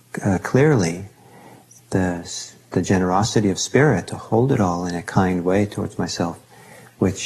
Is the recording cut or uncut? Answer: cut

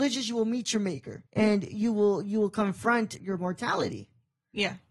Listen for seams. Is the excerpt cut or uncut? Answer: cut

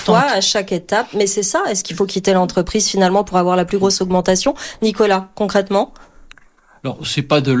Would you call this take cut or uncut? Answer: uncut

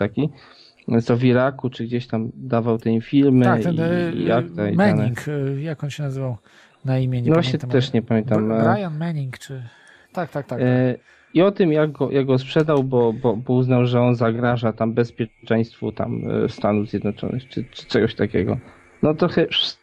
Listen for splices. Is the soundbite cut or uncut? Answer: cut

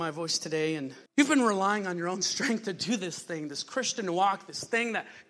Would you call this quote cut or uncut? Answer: cut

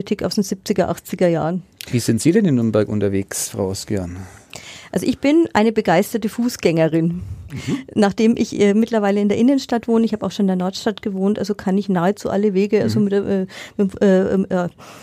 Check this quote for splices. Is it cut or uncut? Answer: uncut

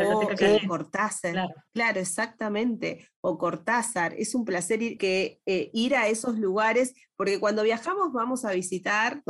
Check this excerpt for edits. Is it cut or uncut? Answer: cut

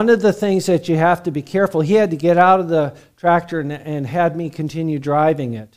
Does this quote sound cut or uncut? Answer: uncut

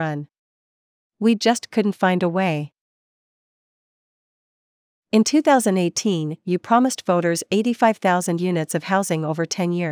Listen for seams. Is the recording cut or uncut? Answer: uncut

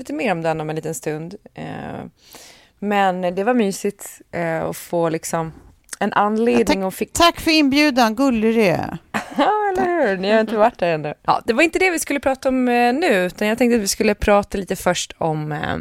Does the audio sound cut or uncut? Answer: cut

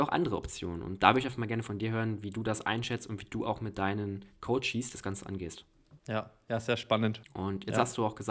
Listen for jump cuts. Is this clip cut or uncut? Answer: cut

